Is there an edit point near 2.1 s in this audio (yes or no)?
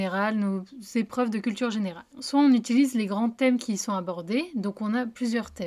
yes